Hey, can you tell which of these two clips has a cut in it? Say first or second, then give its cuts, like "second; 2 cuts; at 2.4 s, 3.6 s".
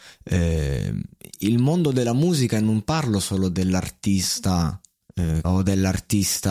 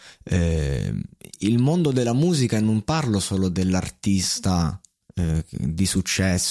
first; 1 cut; at 5.4 s